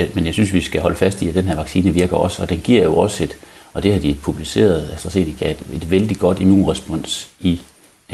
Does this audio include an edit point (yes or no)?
no